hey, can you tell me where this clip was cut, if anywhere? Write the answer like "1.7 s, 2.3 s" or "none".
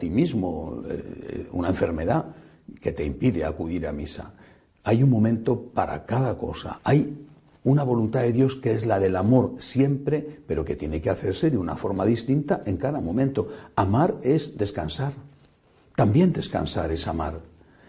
6.8 s